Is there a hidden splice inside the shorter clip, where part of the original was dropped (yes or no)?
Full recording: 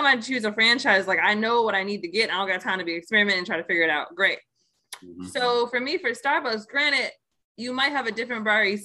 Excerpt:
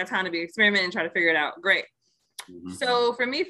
no